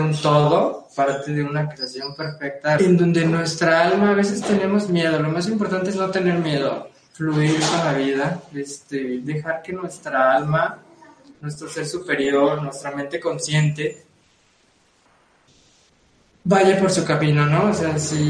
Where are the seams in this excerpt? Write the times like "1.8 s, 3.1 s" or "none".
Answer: 2.8 s